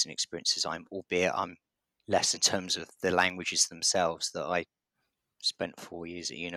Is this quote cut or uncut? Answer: cut